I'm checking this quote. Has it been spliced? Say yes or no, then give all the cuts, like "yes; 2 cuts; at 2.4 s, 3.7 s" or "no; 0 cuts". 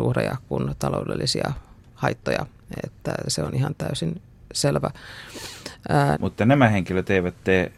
yes; 2 cuts; at 3.2 s, 6.1 s